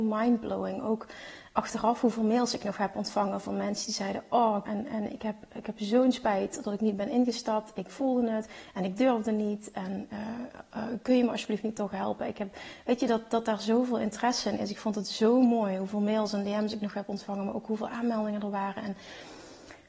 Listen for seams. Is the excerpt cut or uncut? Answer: cut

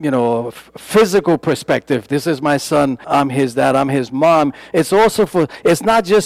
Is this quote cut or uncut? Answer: cut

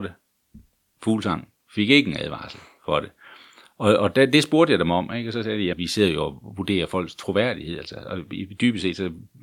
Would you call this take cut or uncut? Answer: cut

